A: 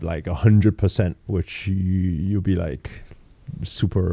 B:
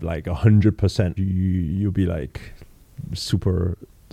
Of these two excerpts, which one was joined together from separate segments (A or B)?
B